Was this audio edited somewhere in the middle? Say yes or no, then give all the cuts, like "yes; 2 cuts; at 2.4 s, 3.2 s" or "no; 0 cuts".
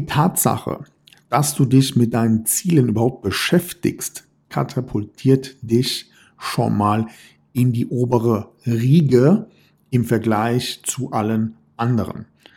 no; 0 cuts